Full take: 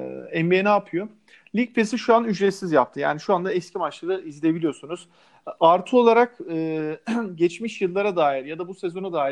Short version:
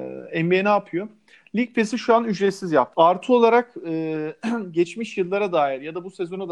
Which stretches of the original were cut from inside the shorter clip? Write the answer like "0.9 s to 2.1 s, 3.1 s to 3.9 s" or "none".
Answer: 2.9 s to 5.6 s